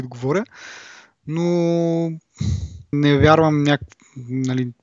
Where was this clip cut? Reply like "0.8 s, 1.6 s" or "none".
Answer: 2.9 s